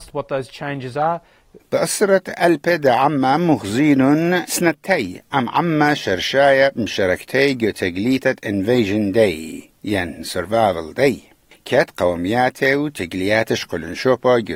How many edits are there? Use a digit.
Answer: 1